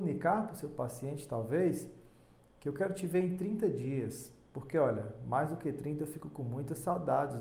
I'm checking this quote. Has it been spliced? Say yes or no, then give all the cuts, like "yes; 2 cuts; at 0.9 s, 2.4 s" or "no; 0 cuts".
no; 0 cuts